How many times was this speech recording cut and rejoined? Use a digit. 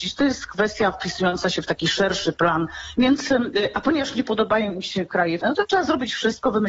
2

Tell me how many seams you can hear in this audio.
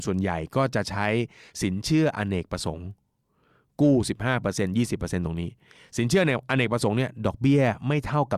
0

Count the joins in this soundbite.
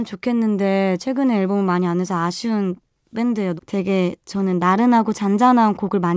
1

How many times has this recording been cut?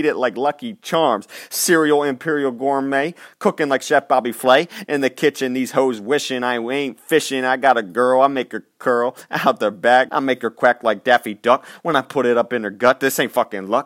1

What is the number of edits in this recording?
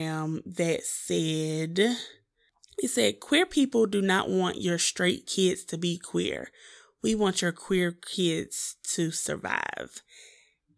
0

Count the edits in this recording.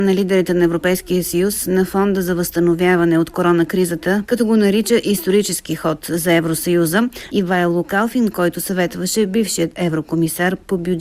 2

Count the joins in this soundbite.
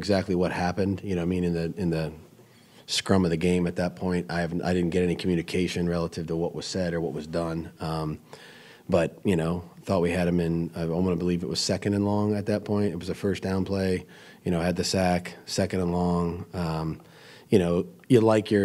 0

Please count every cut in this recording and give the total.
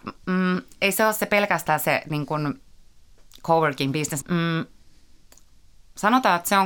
1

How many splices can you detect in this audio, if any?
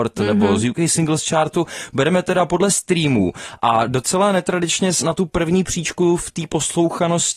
1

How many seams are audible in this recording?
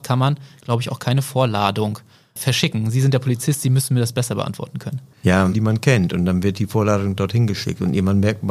1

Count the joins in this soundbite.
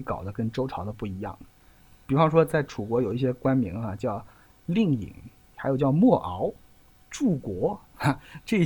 0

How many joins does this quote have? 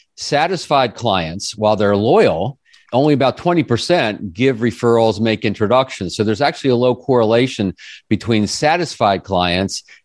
0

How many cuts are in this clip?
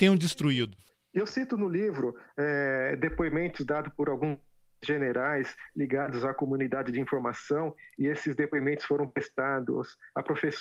0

